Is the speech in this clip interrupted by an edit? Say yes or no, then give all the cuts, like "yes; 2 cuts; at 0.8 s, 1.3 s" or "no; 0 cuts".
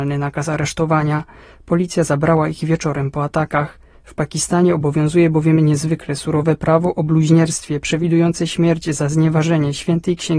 no; 0 cuts